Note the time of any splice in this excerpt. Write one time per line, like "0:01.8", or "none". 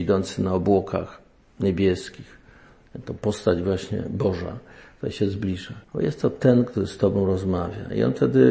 0:05.8